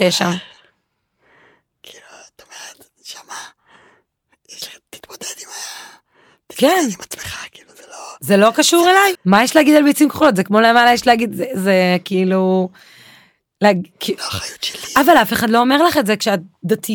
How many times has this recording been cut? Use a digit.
2